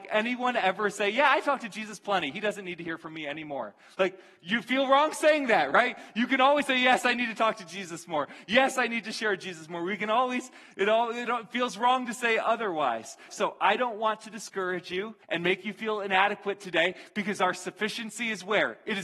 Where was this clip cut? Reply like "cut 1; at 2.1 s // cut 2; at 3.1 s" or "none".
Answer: cut 1; at 13.3 s // cut 2; at 15.2 s